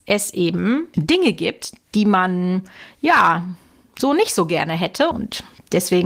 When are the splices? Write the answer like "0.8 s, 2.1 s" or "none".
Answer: 5.1 s

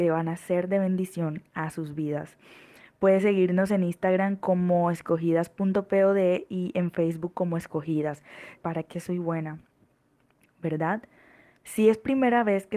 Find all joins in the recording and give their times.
8.6 s, 11.6 s

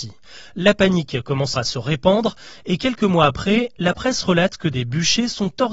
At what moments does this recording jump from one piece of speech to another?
1.5 s

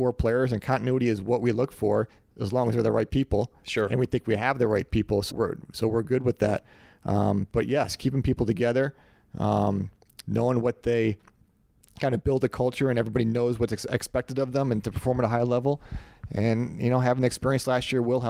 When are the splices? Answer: 5.3 s

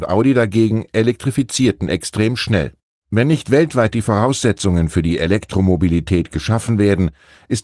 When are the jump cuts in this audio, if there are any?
3.0 s

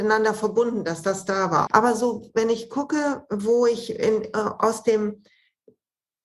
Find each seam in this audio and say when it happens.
1.7 s

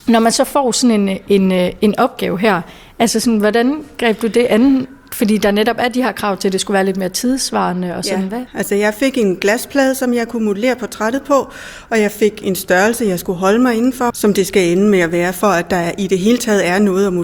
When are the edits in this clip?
8.5 s, 14.1 s

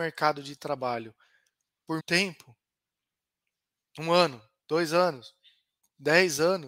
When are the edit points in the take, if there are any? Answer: 2.0 s

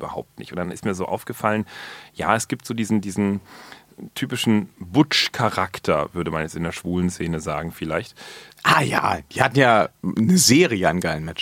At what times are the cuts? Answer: 4.7 s, 8.5 s

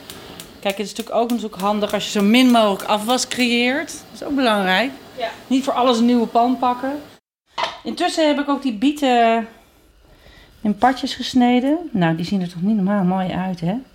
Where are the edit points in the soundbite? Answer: none

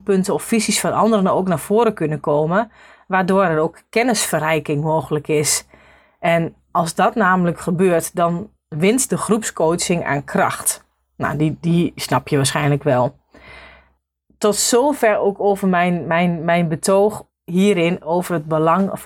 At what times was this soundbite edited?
none

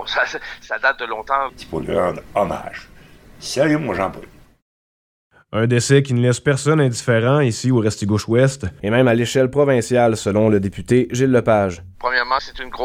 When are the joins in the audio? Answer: 1.5 s

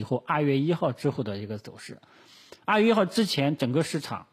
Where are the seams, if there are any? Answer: none

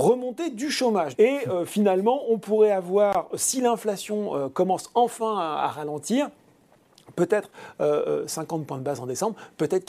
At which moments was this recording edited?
1.1 s

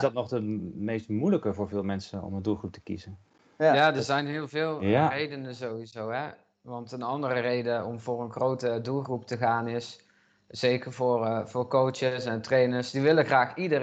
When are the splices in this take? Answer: none

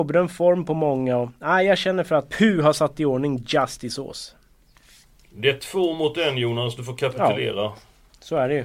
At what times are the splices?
2.3 s

